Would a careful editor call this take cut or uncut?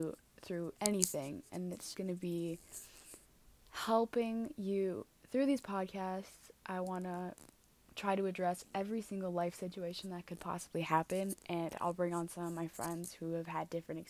cut